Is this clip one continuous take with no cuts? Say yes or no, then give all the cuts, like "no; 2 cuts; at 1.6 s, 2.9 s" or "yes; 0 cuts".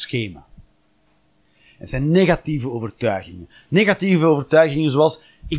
yes; 0 cuts